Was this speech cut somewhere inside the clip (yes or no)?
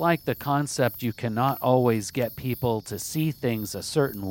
no